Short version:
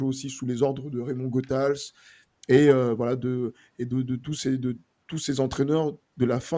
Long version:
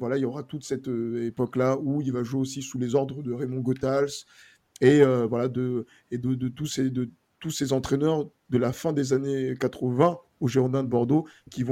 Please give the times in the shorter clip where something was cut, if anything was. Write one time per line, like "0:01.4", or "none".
none